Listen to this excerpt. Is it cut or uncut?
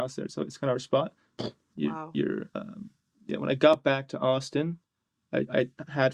cut